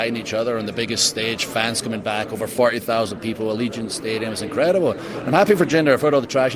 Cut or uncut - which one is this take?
uncut